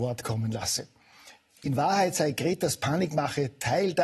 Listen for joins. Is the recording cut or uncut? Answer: uncut